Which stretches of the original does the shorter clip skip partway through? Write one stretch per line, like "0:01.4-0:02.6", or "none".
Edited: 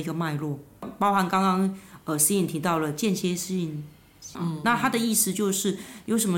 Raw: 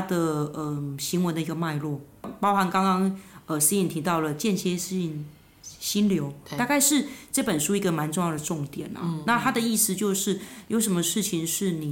0:05.8-0:09.0